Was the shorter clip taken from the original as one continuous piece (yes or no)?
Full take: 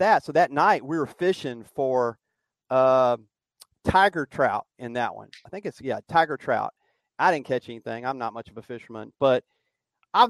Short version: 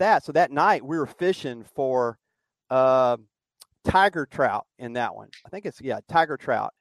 yes